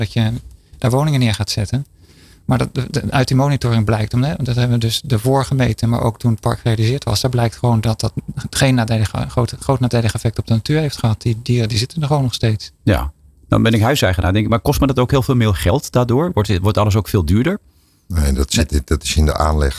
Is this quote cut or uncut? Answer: uncut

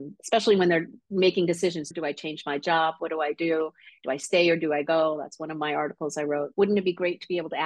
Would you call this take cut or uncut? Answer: cut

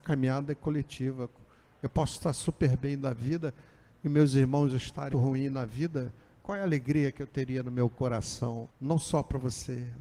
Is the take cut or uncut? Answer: cut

